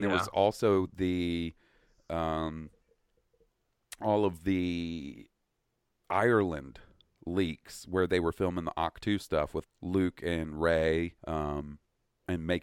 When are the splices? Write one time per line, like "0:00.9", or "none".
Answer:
0:09.6
0:11.2